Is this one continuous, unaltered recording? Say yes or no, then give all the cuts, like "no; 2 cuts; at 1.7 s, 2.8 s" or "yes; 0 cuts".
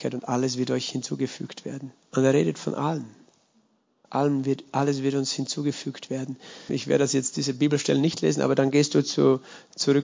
no; 2 cuts; at 2.0 s, 6.7 s